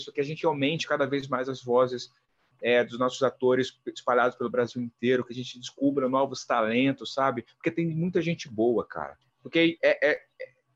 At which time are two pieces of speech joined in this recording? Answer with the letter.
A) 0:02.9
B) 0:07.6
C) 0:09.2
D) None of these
C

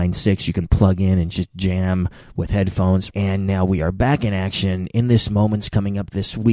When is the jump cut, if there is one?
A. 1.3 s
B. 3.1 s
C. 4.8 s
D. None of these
B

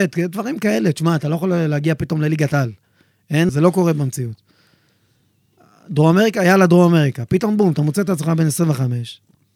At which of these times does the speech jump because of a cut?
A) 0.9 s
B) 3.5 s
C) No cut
B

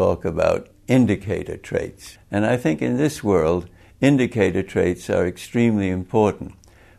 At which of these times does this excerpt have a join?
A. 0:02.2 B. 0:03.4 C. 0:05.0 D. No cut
A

